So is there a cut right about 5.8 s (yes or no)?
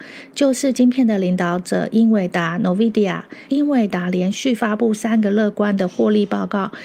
no